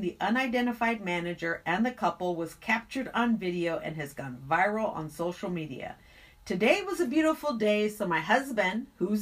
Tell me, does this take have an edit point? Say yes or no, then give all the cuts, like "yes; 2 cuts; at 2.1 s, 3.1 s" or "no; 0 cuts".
no; 0 cuts